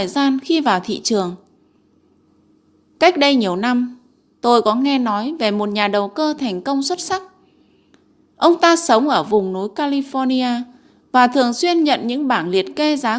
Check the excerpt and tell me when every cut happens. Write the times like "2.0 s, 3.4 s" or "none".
none